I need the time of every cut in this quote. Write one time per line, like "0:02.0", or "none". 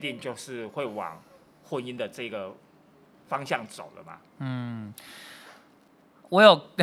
none